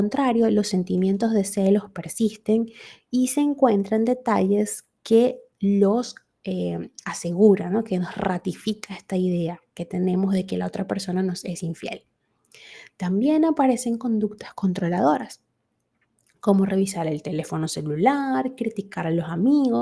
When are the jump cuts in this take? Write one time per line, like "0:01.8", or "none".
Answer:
none